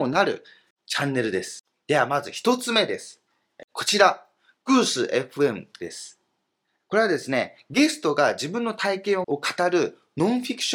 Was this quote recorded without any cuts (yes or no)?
no